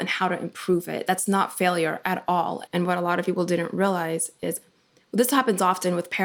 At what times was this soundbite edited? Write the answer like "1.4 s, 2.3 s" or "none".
2.7 s